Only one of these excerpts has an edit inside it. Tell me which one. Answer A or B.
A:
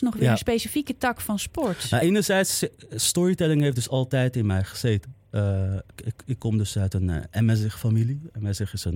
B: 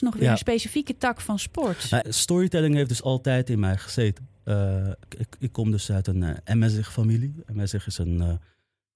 B